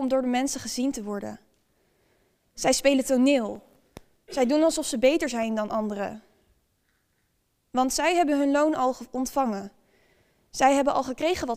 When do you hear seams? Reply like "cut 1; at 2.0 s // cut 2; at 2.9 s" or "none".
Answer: none